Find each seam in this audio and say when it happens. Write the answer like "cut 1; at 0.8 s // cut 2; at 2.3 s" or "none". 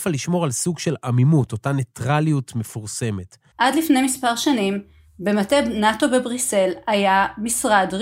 cut 1; at 3.5 s